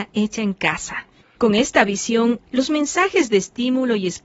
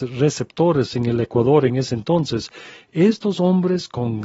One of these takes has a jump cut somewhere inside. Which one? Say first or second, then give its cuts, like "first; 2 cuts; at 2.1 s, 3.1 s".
first; 2 cuts; at 1.4 s, 2.4 s